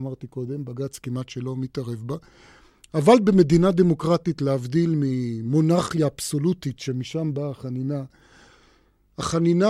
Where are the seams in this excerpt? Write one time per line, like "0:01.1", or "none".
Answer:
none